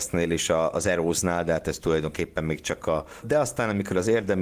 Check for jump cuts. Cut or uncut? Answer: cut